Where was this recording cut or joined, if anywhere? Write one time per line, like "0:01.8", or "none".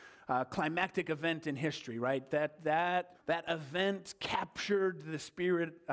0:03.1